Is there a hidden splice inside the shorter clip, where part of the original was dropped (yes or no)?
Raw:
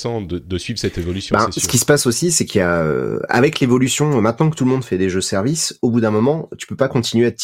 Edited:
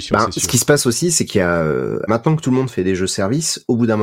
yes